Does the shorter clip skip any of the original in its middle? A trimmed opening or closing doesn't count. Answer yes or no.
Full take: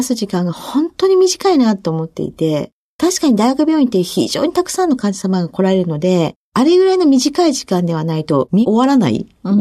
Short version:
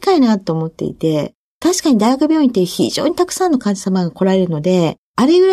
no